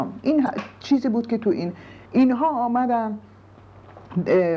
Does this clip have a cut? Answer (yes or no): yes